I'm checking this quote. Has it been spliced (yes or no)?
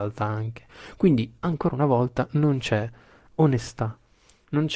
no